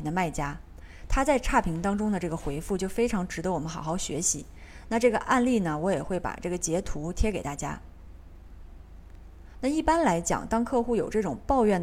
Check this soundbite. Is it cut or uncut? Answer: cut